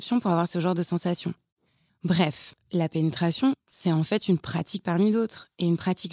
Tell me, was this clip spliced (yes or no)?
yes